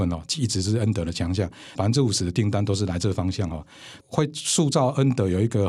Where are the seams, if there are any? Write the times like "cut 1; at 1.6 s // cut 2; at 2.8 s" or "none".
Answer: cut 1; at 1.8 s // cut 2; at 4.0 s